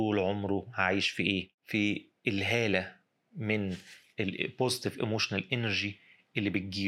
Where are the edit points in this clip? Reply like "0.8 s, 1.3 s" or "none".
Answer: 1.5 s